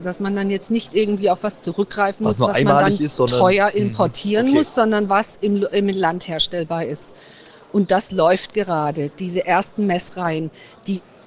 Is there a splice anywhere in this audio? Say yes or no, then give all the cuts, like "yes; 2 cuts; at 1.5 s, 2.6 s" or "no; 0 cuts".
no; 0 cuts